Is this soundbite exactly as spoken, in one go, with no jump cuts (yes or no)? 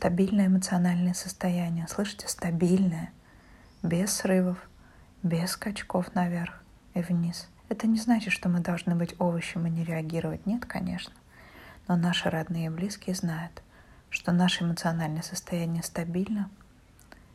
no